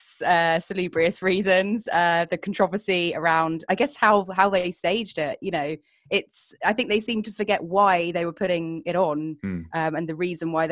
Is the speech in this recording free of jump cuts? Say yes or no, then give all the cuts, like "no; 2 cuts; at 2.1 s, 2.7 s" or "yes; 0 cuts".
yes; 0 cuts